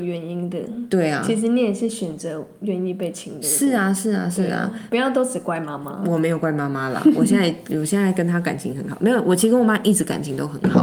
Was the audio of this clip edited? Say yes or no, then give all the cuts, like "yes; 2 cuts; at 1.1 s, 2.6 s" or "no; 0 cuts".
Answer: no; 0 cuts